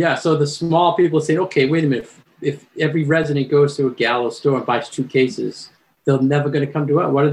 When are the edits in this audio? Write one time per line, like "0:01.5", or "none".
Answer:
none